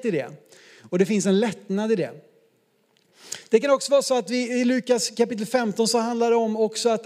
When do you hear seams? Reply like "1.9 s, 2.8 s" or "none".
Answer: none